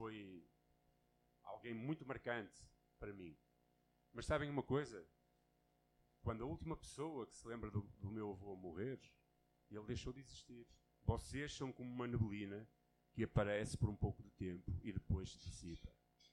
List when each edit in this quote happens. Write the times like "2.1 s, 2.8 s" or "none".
10.9 s